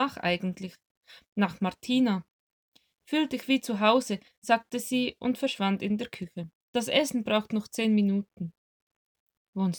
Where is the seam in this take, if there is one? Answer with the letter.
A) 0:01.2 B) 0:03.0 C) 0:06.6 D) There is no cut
C